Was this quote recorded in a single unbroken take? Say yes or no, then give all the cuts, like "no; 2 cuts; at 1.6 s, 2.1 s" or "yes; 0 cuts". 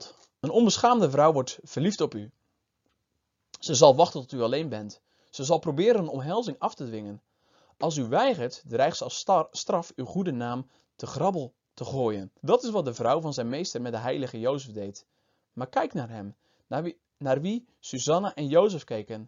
no; 1 cut; at 12.4 s